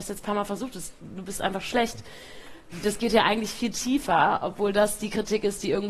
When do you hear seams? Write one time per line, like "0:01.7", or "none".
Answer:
none